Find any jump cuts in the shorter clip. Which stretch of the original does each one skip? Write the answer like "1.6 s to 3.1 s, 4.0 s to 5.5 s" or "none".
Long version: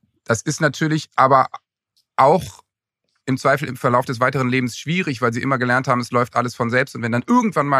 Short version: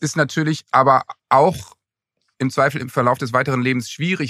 1.6 s to 2.1 s